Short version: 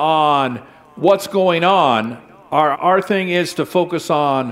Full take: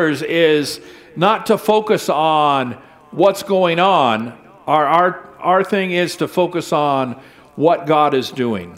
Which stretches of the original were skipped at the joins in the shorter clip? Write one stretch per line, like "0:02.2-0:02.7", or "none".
0:04.9-0:05.3